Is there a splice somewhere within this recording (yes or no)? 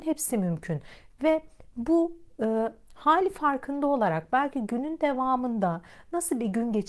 no